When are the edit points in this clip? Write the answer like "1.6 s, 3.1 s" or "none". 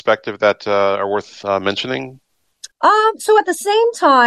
2.7 s